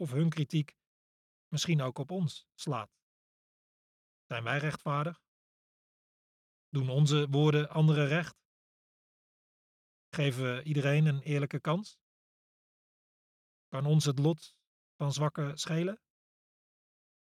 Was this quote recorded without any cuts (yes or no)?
yes